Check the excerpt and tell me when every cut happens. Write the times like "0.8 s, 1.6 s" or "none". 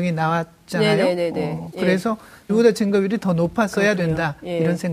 2.5 s

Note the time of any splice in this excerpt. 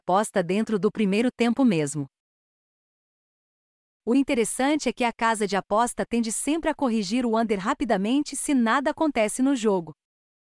none

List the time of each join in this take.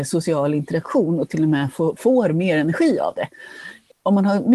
none

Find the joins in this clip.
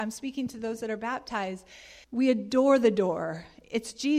2.0 s

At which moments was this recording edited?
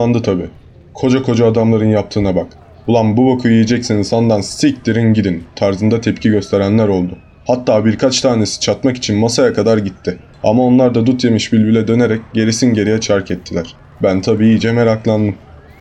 none

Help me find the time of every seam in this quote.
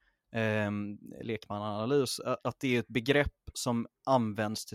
2.4 s

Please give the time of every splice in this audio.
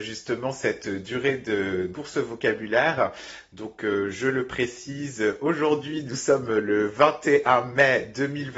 1.9 s

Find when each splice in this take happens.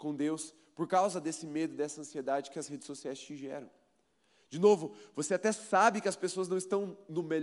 none

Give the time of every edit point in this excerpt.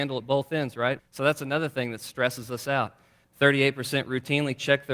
1.0 s, 3.2 s

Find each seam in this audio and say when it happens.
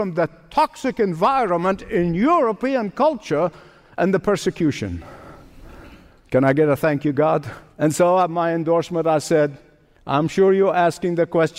6.2 s, 7.7 s

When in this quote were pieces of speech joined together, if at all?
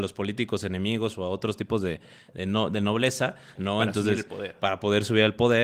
3.6 s

